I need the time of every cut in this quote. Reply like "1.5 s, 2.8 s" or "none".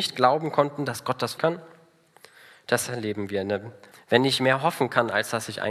1.4 s, 3.9 s